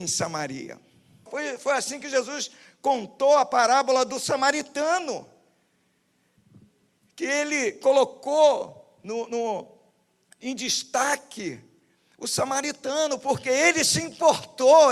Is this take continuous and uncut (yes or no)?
no